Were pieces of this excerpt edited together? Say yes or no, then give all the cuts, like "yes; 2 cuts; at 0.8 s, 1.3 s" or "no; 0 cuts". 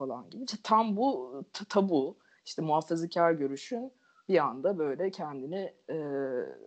no; 0 cuts